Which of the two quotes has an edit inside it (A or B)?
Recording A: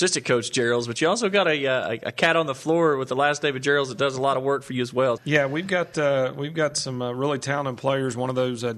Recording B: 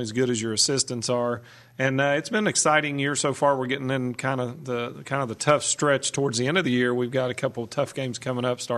A